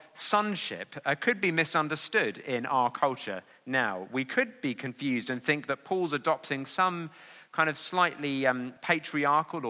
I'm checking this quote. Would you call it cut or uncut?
cut